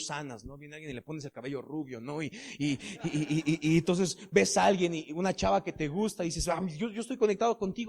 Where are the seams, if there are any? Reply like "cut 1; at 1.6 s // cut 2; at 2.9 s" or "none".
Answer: none